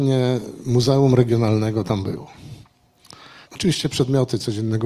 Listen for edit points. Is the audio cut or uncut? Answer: cut